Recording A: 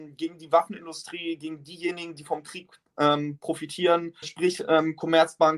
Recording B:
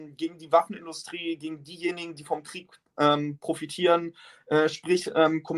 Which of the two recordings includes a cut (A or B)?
A